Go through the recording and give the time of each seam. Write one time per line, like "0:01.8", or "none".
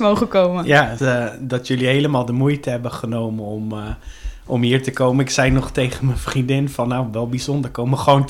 0:01.0